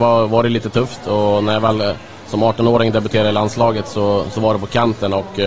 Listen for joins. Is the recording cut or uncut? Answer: uncut